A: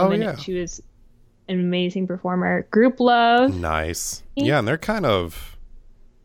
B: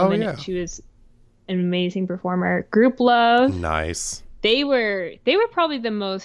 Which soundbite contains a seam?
A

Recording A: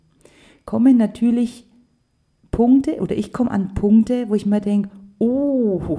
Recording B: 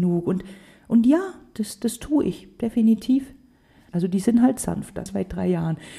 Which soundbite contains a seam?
B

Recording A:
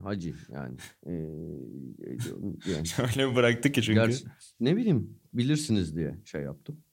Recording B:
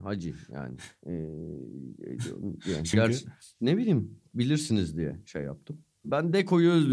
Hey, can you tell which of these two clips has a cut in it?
B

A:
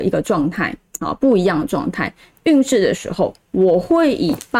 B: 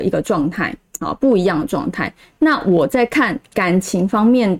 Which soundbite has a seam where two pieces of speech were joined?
A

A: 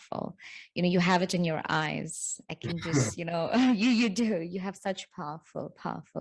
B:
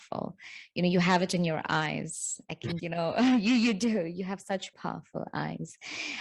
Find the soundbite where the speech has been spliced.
B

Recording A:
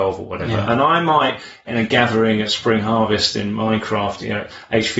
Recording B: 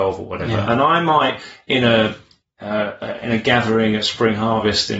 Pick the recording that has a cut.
A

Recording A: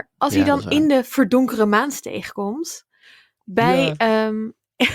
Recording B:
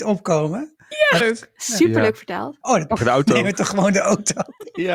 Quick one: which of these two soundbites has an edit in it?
B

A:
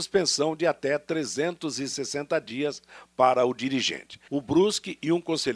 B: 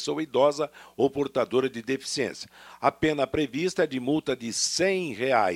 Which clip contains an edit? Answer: A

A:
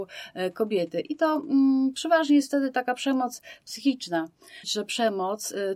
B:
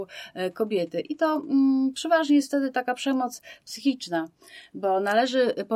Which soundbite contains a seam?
A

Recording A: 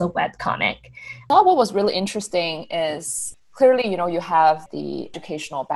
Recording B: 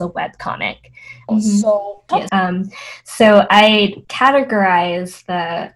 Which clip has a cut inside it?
B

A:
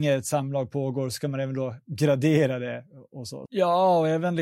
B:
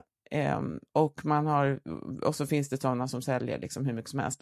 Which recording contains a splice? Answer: A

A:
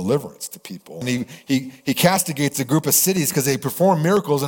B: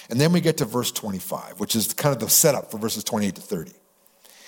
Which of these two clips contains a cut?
A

